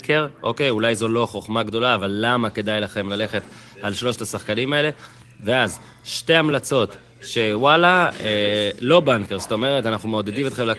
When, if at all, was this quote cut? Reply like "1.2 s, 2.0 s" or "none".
none